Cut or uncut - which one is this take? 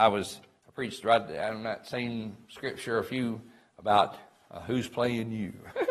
uncut